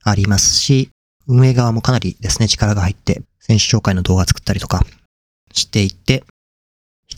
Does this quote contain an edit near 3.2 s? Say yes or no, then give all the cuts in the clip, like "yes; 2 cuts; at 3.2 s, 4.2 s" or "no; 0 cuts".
yes; 1 cut; at 3.2 s